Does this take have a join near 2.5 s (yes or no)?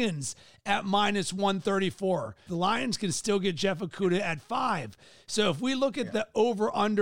yes